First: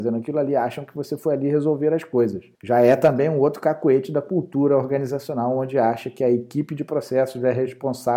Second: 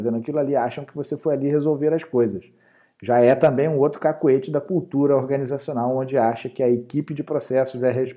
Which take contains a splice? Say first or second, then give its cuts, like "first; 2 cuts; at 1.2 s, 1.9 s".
first; 1 cut; at 2.5 s